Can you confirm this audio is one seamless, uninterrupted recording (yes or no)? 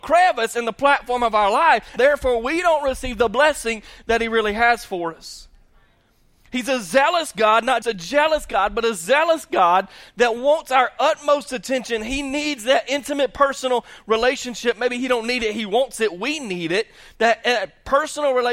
no